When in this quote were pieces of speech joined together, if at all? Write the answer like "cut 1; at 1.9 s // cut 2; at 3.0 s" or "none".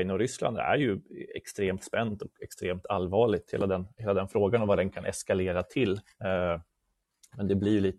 none